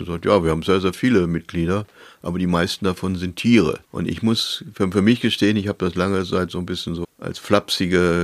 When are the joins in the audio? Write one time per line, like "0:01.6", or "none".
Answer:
0:03.8
0:07.0

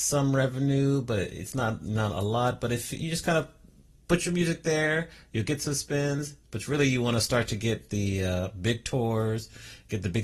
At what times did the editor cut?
none

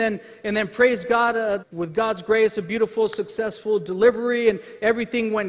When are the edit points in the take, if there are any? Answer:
0:01.6

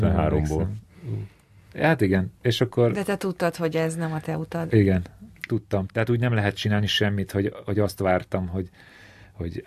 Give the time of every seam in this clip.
0:05.9

